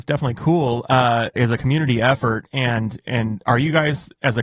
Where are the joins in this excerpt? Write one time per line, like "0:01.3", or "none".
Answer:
0:01.4

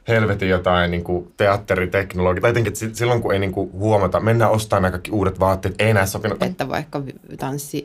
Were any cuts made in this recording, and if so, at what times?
0:02.6
0:06.4

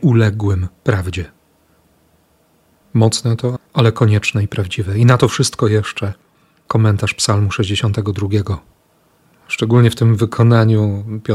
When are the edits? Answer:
0:03.6

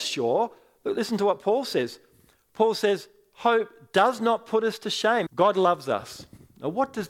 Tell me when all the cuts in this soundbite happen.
0:05.3

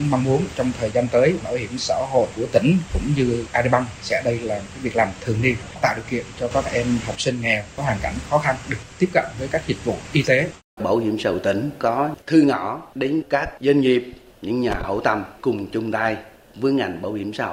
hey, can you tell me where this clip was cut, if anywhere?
0:10.8

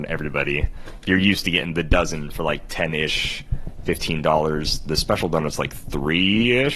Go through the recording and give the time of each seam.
none

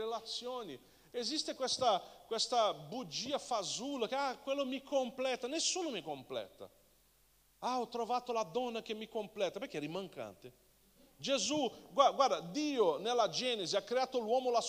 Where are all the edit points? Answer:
none

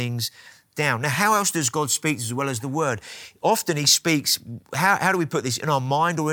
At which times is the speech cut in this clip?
none

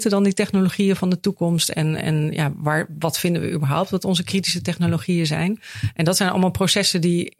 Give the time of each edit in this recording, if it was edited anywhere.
none

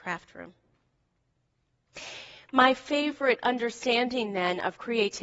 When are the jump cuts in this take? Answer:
none

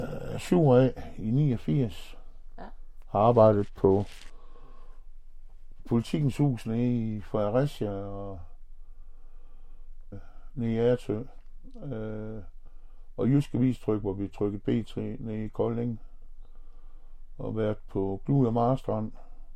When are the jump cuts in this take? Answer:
0:10.1

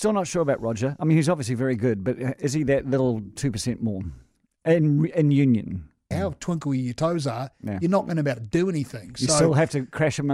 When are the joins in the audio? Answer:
0:06.1

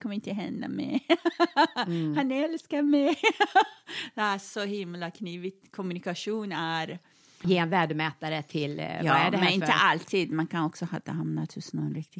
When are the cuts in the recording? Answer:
0:07.4

